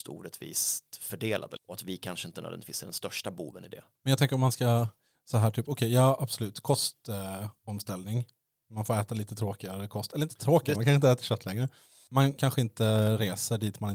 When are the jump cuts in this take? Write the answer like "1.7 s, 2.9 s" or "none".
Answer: 10.7 s, 12.4 s